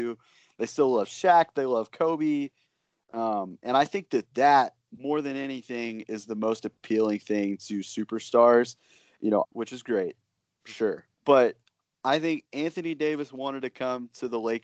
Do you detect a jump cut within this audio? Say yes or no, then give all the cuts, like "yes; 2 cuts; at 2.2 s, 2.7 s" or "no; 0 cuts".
yes; 2 cuts; at 9.4 s, 11.1 s